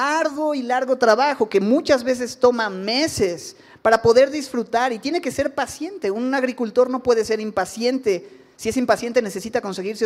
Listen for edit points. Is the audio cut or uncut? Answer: uncut